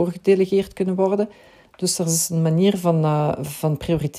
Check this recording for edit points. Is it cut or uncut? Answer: cut